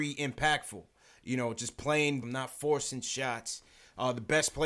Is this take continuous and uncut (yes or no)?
no